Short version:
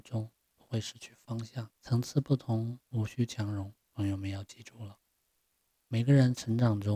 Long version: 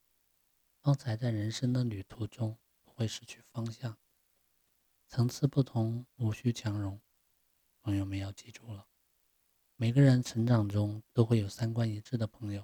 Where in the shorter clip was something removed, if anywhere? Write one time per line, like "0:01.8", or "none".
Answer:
0:01.7
0:03.8

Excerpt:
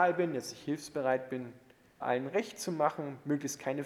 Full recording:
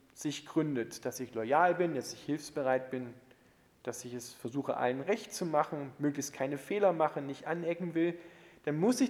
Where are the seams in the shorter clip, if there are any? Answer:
0:02.0

